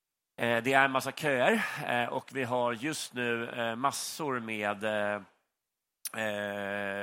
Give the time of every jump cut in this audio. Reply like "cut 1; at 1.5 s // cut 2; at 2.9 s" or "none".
none